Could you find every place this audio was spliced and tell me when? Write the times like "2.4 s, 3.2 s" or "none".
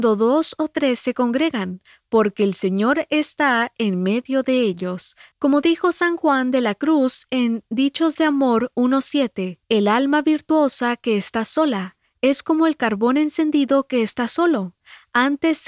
5.3 s, 9.6 s